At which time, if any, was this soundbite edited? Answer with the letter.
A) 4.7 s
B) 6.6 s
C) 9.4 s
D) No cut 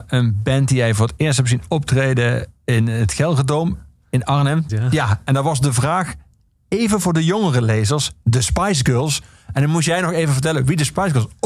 A